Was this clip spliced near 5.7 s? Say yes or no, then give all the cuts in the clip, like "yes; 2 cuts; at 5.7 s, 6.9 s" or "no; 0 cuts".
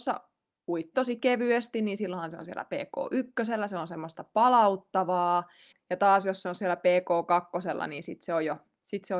no; 1 cut; at 0.9 s